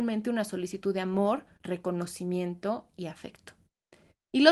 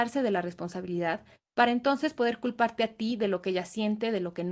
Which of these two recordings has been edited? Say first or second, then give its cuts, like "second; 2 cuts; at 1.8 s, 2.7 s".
first; 1 cut; at 1.6 s